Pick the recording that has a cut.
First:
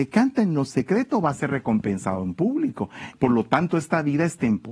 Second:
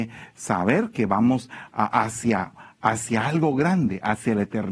first; 1 cut; at 3.1 s

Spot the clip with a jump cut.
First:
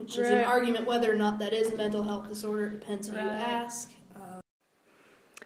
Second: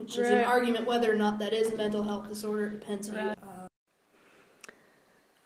second; 1 cut; at 3.3 s

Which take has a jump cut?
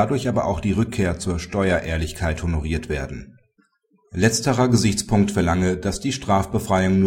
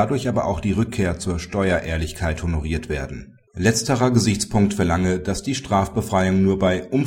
second; 1 cut; at 3.5 s

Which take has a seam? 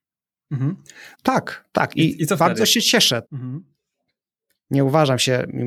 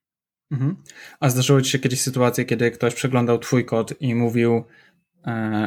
first; 2 cuts; at 1.1 s, 3.2 s

